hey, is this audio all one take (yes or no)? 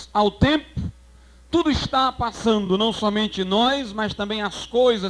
yes